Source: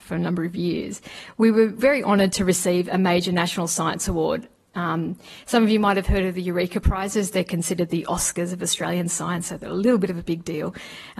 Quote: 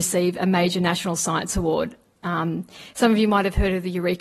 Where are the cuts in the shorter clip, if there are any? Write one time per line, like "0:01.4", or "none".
none